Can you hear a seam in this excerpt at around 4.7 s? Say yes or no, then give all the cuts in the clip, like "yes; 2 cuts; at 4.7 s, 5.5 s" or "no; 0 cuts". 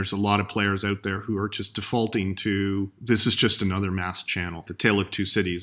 yes; 1 cut; at 4.7 s